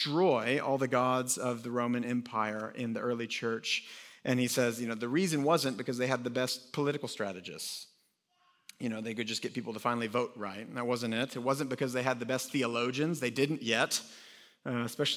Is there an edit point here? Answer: no; 0 cuts

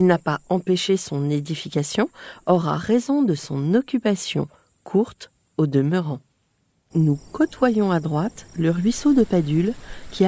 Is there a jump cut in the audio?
yes; 1 cut; at 6.9 s

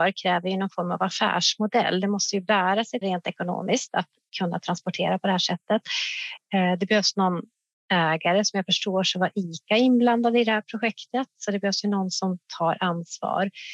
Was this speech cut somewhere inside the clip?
yes; 1 cut; at 3.0 s

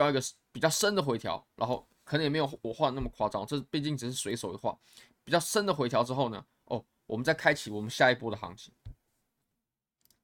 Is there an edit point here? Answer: no; 0 cuts

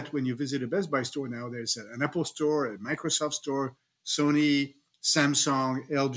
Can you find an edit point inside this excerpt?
no; 0 cuts

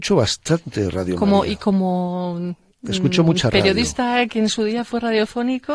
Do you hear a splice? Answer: no; 0 cuts

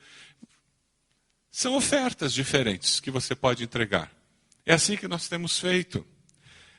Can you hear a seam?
no; 0 cuts

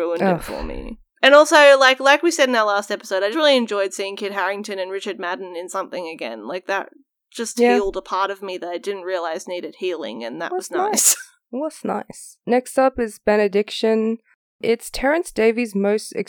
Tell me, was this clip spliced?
yes; 1 cut; at 3.3 s

